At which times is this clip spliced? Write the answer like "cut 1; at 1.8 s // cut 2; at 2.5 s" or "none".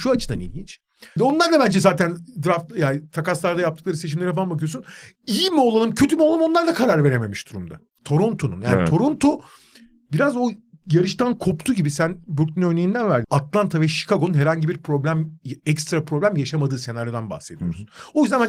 cut 1; at 1.2 s // cut 2; at 8.0 s // cut 3; at 13.2 s